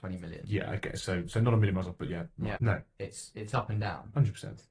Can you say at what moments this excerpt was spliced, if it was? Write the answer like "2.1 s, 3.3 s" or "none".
2.6 s